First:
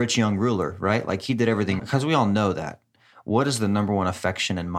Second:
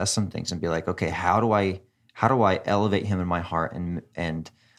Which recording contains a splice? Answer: first; 1 cut; at 1.8 s

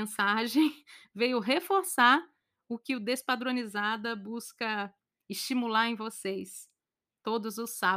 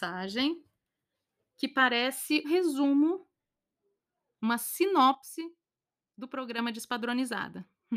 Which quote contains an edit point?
second; 1 cut; at 2.4 s

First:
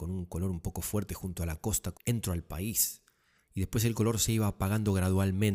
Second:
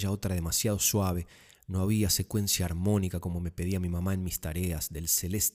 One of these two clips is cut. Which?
first; 1 cut; at 1.9 s

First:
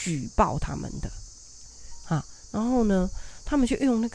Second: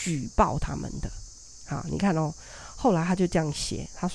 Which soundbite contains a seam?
first; 1 cut; at 1.7 s

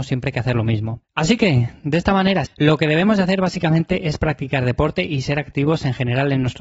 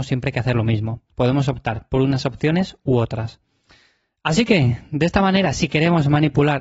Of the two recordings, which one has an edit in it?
first; 2 cuts; at 1.0 s, 2.5 s

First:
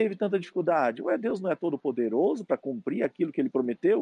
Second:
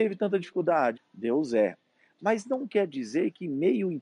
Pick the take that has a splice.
second; 1 cut; at 1.0 s

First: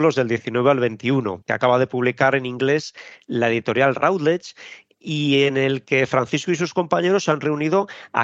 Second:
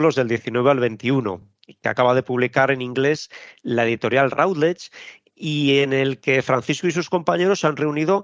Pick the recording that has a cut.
first; 1 cut; at 1.4 s

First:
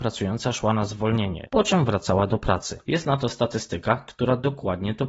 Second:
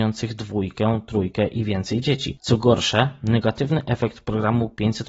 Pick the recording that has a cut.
first; 2 cuts; at 1.5 s, 2.8 s

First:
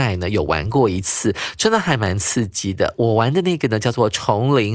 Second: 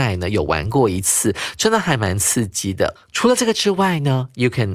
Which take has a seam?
second; 1 cut; at 3.0 s

